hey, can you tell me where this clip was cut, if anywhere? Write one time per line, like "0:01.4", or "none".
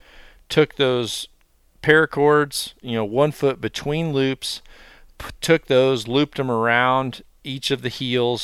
0:02.8